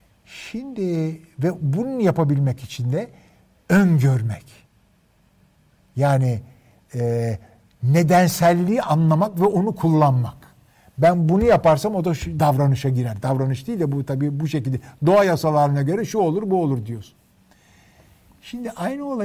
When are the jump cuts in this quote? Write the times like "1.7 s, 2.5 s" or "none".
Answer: 12.4 s

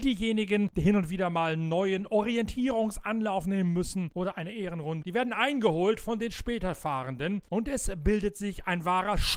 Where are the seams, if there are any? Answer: 5.0 s

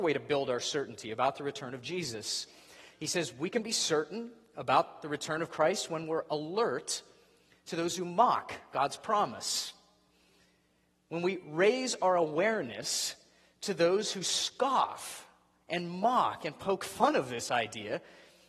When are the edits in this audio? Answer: none

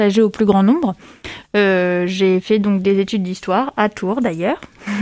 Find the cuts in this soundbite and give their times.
1.4 s

